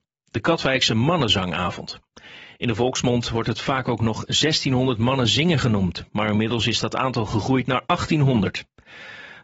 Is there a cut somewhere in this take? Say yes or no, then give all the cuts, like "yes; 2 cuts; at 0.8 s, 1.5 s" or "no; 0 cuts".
no; 0 cuts